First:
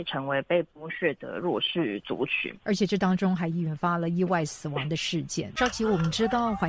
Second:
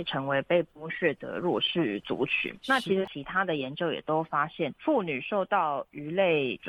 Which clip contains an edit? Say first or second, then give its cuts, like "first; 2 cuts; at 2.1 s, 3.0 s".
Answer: first; 2 cuts; at 2.6 s, 5.6 s